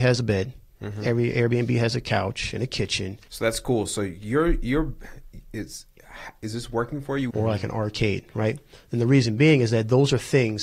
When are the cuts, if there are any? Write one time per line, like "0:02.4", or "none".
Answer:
0:03.3
0:07.3